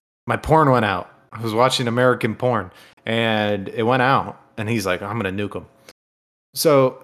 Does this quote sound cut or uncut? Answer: uncut